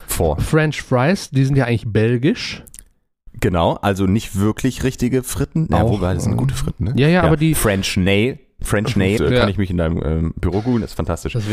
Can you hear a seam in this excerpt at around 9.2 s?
yes; 1 cut; at 9.2 s

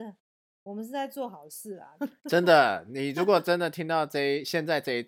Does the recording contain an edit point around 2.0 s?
yes; 1 cut; at 2.0 s

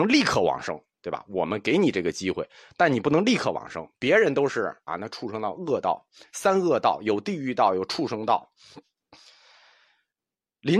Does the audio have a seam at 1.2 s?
no; 1 cut; at 4.9 s

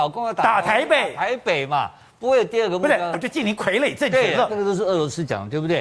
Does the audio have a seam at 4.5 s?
yes; 2 cuts; at 3.1 s, 4.5 s

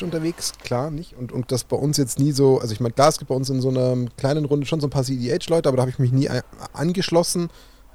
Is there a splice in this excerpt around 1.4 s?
yes; 1 cut; at 1.4 s

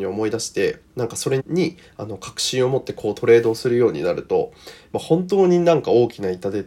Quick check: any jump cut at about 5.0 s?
no; 1 cut; at 1.4 s

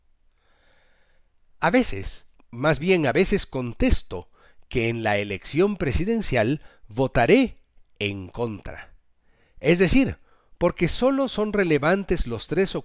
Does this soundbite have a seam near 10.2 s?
no; 1 cut; at 2.4 s

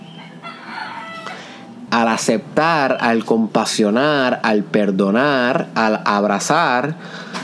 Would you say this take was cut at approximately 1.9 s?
yes; 1 cut; at 1.9 s

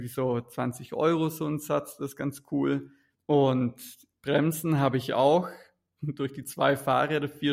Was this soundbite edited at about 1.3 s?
no; 1 cut; at 3.1 s

